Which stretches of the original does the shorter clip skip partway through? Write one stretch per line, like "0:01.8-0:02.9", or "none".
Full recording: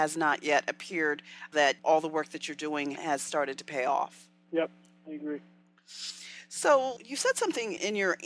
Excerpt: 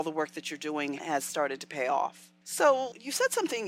0:04.4-0:06.5